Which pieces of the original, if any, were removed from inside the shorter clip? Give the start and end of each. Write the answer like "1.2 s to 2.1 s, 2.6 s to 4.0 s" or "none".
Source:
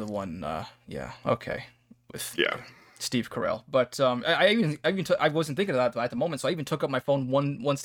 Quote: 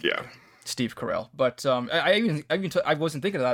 none

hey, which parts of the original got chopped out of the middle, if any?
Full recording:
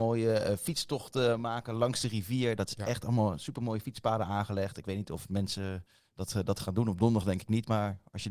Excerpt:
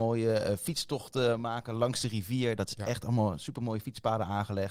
none

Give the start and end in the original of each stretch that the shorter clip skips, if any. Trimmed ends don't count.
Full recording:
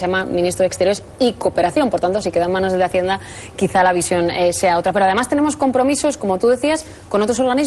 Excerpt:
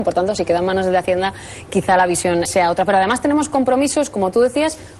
4.3 s to 4.5 s

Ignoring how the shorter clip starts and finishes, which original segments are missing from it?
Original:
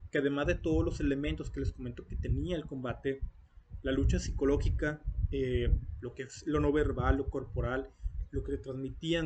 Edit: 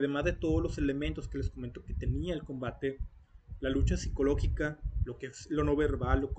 5.3 s to 6.0 s

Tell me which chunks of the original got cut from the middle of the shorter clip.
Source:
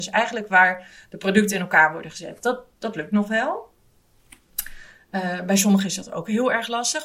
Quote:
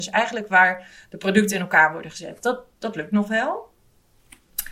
none

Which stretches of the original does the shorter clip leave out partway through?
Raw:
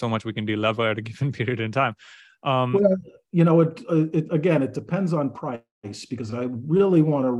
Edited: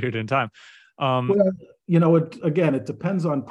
3.9 s to 4.3 s

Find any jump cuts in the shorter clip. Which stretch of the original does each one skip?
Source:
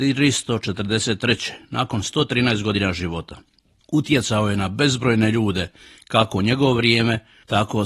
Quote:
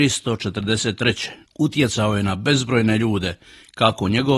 1.7 s to 3.8 s

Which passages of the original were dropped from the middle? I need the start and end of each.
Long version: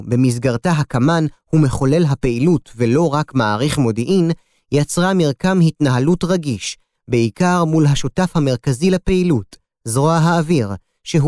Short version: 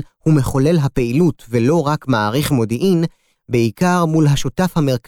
4.6 s to 6.9 s

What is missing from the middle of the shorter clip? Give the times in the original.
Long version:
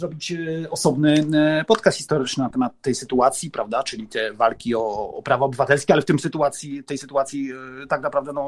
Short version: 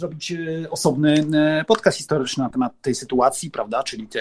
none

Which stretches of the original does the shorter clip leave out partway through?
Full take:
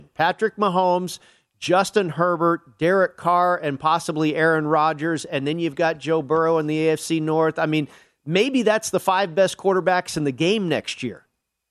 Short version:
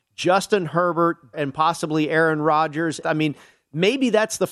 2.8 s to 3.6 s, 5.3 s to 7.5 s

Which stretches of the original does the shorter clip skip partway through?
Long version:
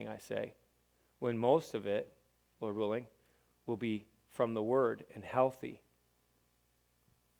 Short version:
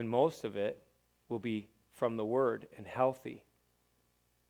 2.5 s to 3.6 s

